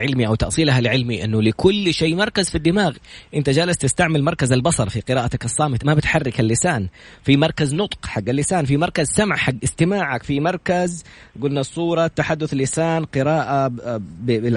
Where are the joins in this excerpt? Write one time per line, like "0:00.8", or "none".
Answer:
0:05.8